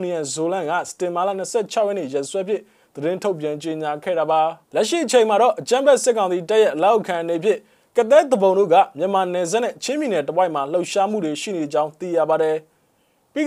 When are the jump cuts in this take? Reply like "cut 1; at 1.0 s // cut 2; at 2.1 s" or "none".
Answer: cut 1; at 4.6 s